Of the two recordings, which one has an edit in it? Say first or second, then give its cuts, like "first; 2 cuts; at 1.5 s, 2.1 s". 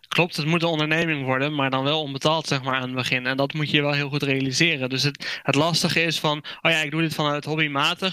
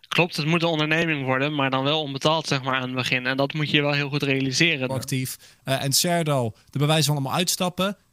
second; 1 cut; at 4.9 s